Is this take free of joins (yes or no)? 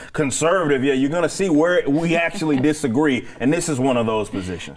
yes